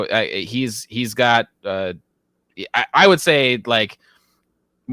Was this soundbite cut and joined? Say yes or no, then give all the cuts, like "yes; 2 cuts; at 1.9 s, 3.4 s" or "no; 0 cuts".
no; 0 cuts